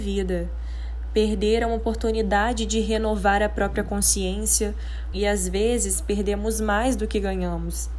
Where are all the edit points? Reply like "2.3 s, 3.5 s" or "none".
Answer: 5.1 s